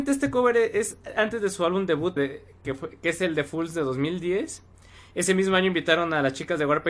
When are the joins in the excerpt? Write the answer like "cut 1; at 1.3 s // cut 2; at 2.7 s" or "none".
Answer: cut 1; at 2.2 s